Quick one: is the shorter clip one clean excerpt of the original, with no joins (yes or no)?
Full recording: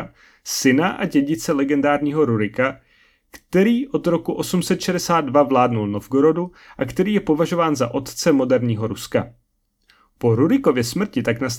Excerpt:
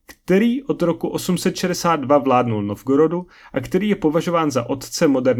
yes